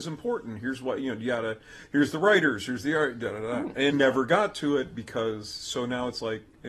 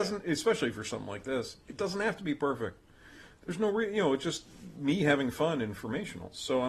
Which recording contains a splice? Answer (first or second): first